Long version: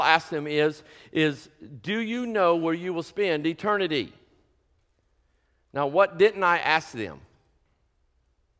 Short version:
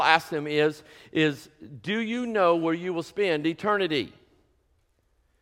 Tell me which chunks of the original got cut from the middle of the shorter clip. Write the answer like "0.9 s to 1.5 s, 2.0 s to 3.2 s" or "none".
none